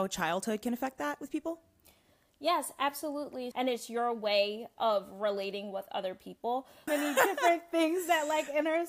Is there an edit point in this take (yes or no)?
yes